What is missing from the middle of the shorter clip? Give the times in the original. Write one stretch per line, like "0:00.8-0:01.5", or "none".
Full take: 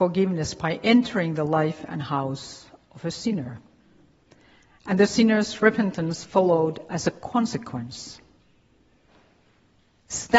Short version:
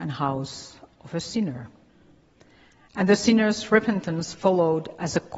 none